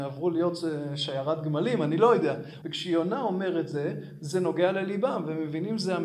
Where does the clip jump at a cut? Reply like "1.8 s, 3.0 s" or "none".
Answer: 2.6 s